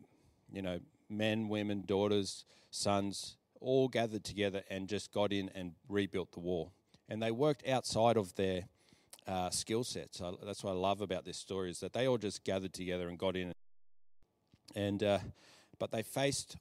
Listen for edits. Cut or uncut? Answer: uncut